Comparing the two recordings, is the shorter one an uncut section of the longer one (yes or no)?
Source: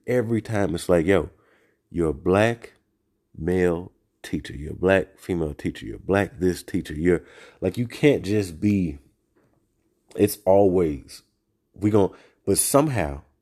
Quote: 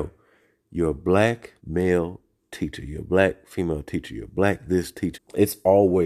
no